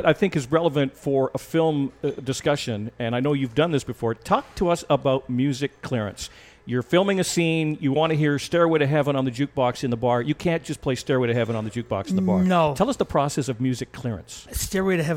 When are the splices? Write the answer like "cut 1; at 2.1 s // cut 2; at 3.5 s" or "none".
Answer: none

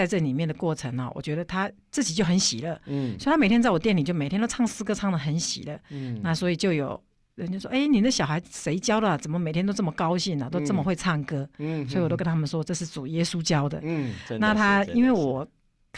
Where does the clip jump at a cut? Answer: none

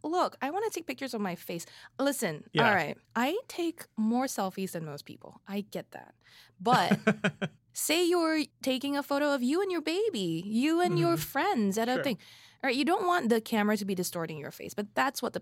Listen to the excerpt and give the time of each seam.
cut 1; at 3.0 s // cut 2; at 8.5 s

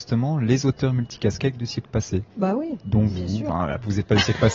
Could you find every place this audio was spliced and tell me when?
cut 1; at 2.3 s

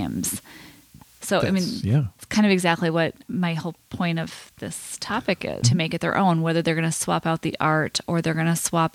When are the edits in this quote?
cut 1; at 3.2 s // cut 2; at 5.6 s

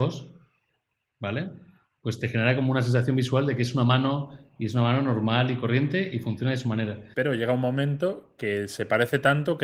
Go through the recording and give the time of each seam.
cut 1; at 7.1 s

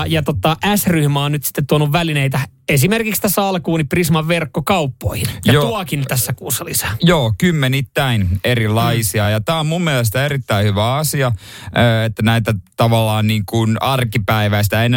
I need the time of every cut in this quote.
none

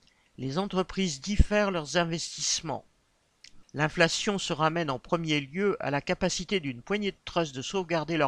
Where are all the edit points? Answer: cut 1; at 3.6 s

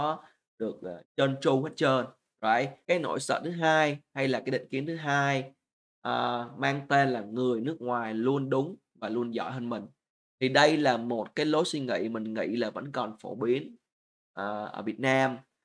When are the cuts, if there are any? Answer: cut 1; at 2.8 s

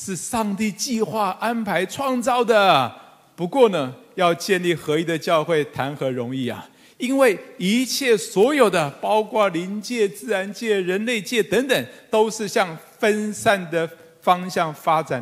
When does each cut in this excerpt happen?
none

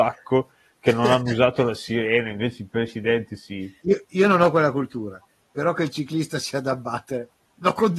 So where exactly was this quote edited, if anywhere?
cut 1; at 3.8 s

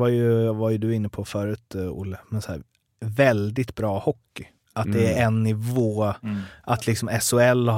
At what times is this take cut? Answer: none

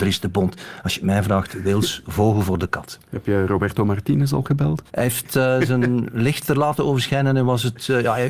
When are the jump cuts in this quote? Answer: cut 1; at 4.9 s

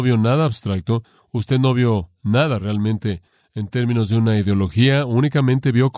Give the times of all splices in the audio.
none

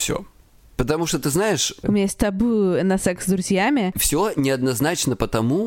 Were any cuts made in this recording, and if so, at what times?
cut 1; at 1.8 s // cut 2; at 3.9 s

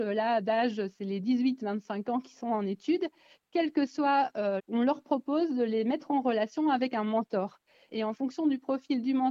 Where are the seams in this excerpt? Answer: cut 1; at 4.6 s // cut 2; at 7.9 s

